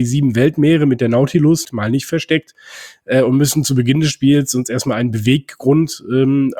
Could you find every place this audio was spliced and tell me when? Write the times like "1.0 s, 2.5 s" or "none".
1.7 s